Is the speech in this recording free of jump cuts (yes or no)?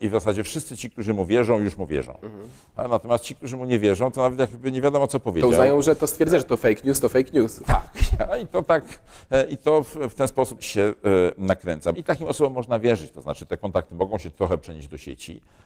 no